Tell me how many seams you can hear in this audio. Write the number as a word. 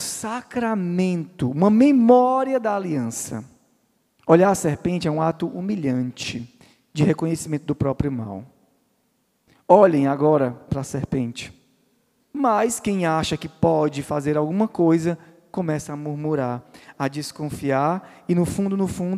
one